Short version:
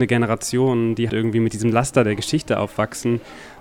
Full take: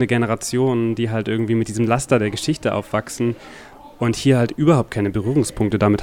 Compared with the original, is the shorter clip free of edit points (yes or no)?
no